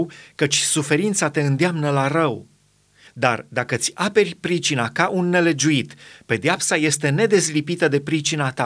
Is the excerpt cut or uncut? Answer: cut